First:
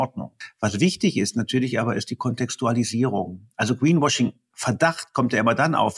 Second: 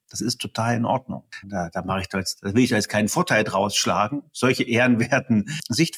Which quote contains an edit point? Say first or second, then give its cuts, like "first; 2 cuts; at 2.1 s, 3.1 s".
second; 1 cut; at 1.4 s